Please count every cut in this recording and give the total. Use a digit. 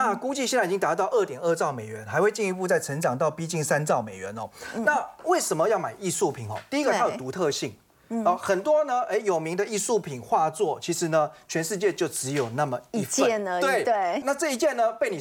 1